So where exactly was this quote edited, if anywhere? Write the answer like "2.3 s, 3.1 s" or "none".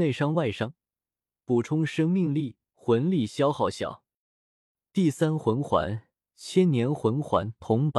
none